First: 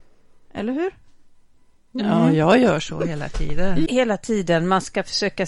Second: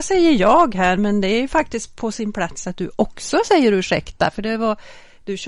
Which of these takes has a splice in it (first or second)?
first